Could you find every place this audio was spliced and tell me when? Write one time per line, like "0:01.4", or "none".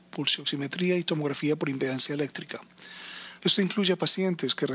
0:03.4